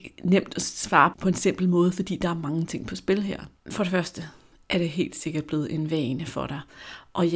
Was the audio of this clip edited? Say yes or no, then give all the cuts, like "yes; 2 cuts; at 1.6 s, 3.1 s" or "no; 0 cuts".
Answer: yes; 1 cut; at 1.1 s